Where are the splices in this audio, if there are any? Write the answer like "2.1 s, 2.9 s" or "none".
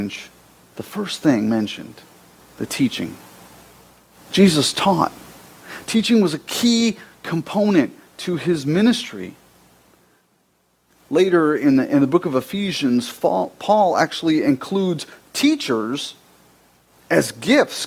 none

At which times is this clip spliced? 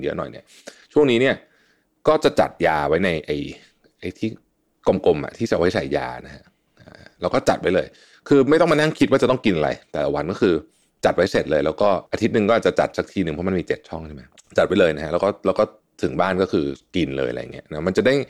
none

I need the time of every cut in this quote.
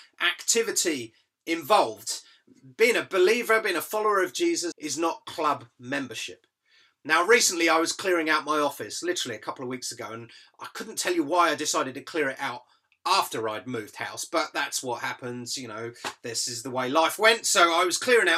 4.7 s

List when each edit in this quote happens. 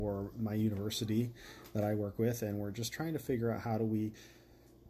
none

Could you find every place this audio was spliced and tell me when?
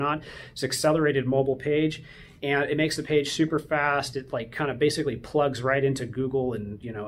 none

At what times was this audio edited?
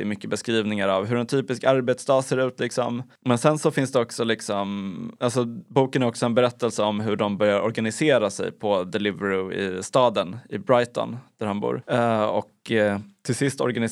none

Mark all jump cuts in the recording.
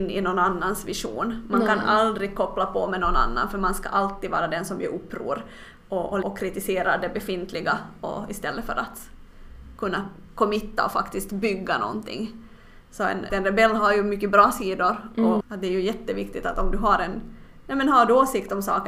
6.2 s, 13.3 s, 15.4 s

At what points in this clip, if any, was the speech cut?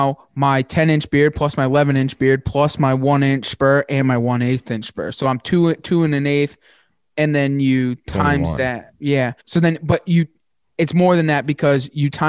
9.4 s

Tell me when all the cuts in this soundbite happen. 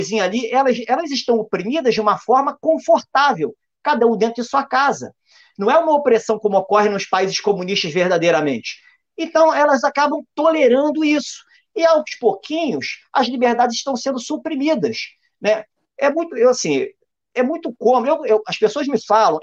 none

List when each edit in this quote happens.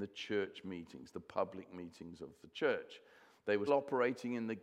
3.7 s

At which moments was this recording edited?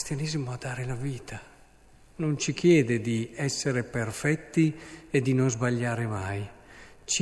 none

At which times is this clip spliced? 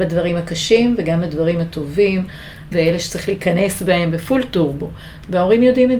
2.7 s

